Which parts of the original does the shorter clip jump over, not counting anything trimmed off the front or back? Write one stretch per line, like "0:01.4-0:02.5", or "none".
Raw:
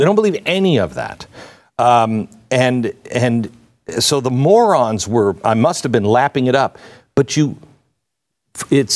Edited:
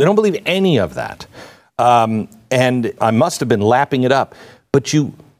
0:03.0-0:05.4